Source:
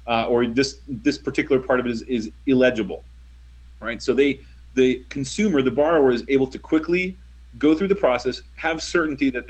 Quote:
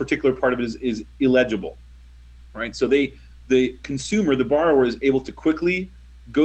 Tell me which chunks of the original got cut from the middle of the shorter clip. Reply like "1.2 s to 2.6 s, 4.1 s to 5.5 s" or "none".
none